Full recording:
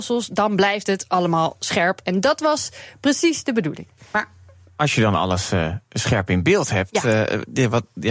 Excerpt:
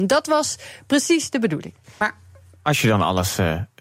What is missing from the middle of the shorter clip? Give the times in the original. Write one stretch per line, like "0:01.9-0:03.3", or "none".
none